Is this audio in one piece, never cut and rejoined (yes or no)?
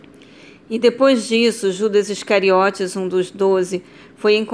yes